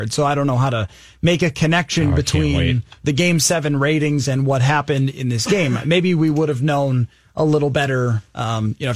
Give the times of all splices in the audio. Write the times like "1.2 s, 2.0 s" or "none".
none